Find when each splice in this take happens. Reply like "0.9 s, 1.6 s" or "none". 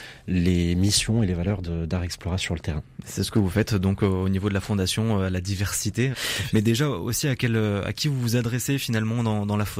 6.1 s